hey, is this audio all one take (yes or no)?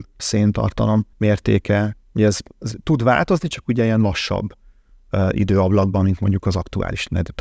yes